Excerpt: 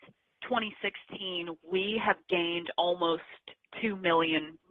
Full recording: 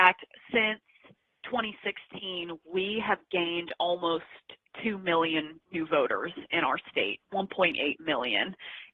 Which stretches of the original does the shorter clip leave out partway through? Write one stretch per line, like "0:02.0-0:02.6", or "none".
none